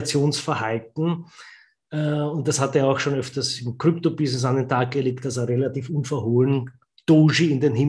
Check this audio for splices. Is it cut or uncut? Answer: uncut